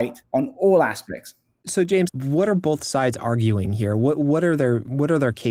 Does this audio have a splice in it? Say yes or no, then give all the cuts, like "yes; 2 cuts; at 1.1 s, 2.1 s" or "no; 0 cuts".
yes; 1 cut; at 2.1 s